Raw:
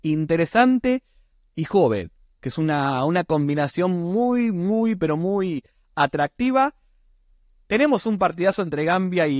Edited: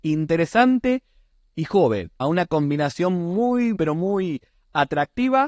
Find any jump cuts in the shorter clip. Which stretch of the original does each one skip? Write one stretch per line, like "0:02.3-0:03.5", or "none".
0:02.2-0:03.0
0:04.5-0:05.0